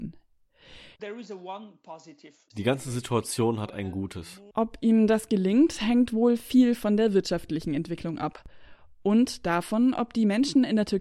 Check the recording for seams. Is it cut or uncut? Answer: cut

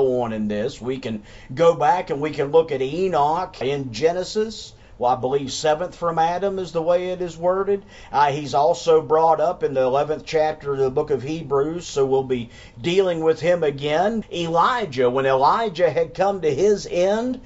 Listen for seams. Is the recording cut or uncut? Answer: cut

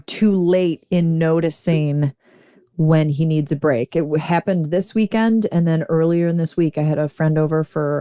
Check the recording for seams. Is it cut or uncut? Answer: uncut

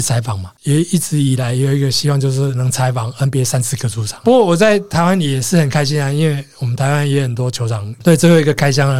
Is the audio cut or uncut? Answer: cut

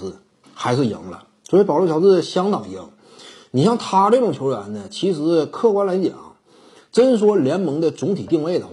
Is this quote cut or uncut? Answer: uncut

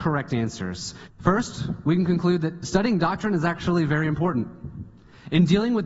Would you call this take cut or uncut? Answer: cut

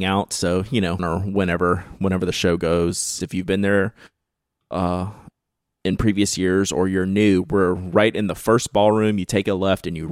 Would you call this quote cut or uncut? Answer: cut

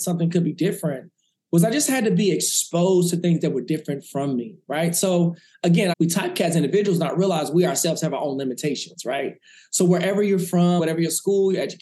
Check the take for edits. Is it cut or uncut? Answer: cut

